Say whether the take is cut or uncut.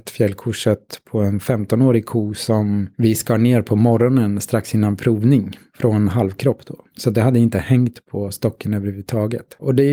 uncut